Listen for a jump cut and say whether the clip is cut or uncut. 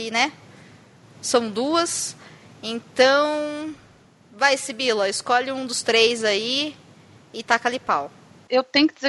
uncut